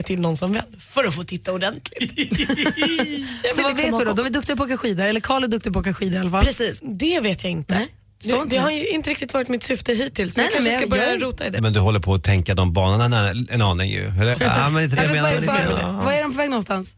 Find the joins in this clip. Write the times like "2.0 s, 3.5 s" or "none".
6.8 s, 11.6 s, 14.3 s